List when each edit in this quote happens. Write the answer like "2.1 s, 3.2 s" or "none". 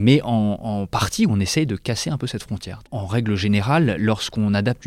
none